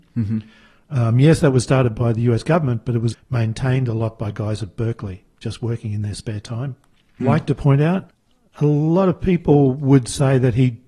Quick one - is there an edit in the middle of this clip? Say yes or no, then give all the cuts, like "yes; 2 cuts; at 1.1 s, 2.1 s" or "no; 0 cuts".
yes; 2 cuts; at 3.1 s, 7.2 s